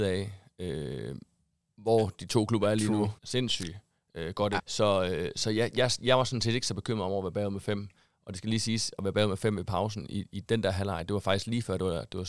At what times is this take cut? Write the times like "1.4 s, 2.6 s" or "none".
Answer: 3.2 s, 4.6 s